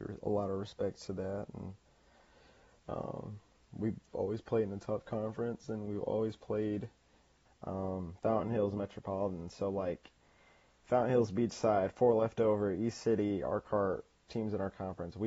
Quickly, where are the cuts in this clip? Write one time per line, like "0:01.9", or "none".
0:07.5
0:14.3